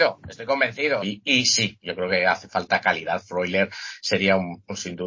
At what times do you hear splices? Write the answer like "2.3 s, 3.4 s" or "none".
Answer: 1.0 s